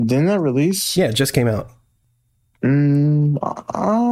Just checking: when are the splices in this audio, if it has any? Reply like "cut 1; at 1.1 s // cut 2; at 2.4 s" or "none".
none